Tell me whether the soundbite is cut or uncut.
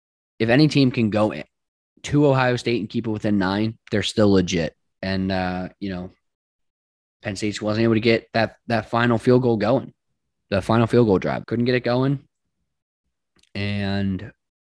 cut